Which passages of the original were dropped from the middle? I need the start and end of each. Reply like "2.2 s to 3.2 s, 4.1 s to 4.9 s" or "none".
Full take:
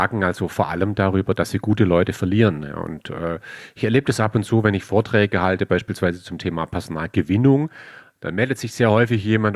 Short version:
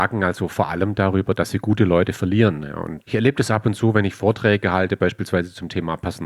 3.0 s to 3.7 s